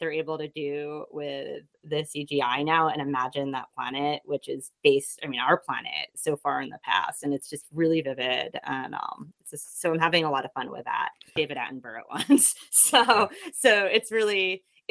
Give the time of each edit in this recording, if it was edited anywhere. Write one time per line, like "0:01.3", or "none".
0:11.4